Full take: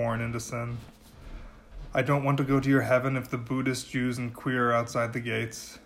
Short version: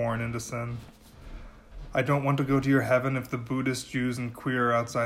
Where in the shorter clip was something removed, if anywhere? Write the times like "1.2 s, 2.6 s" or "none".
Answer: none